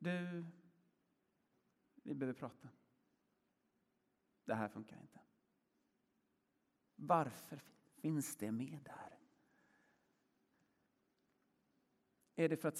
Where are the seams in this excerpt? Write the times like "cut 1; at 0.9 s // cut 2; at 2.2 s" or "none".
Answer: cut 1; at 6.9 s